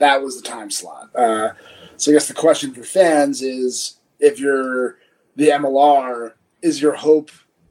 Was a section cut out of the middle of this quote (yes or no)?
yes